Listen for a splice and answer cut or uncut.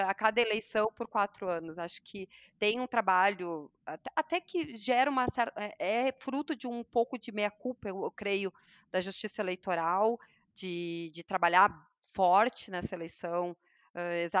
uncut